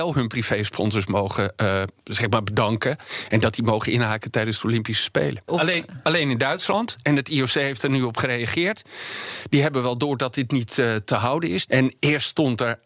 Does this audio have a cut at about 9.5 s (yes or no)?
no